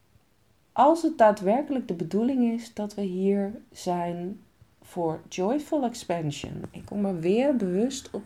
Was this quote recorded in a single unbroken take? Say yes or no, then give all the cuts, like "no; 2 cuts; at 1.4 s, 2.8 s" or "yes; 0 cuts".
yes; 0 cuts